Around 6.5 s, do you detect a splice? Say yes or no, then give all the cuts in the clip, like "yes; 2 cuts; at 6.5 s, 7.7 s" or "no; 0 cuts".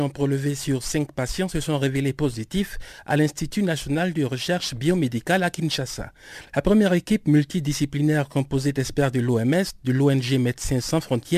no; 0 cuts